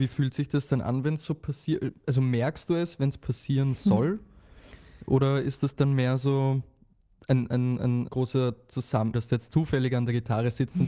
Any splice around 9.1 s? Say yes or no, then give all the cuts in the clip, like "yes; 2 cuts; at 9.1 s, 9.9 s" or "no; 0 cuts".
yes; 2 cuts; at 8.1 s, 9.1 s